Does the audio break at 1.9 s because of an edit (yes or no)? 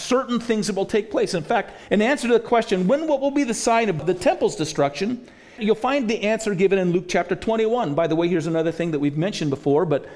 no